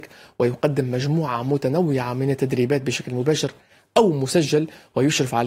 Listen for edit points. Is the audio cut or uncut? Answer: uncut